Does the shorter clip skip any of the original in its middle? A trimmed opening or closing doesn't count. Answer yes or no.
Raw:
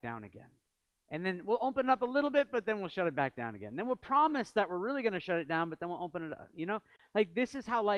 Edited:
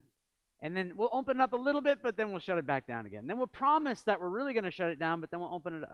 no